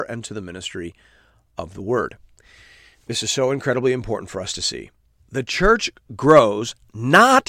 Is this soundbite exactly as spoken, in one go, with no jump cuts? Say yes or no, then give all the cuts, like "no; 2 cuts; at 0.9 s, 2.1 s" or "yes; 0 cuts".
yes; 0 cuts